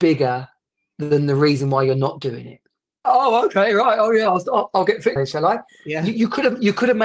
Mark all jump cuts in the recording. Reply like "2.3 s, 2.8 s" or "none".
3.0 s, 5.2 s